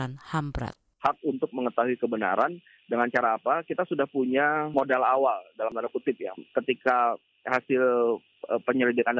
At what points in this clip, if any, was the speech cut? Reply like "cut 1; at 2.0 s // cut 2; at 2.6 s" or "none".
cut 1; at 6.3 s